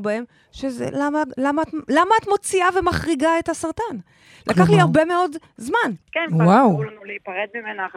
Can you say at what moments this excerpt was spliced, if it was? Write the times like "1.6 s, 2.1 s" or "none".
0.9 s, 6.0 s